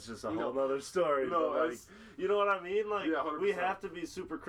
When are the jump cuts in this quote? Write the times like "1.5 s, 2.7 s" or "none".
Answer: none